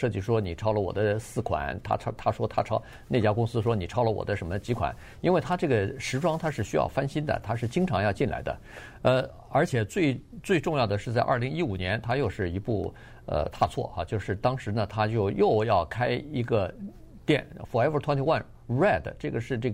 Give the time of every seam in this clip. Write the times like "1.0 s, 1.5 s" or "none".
none